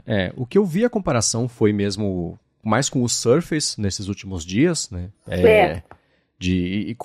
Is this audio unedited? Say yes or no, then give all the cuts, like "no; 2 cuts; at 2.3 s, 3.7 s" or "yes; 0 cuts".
yes; 0 cuts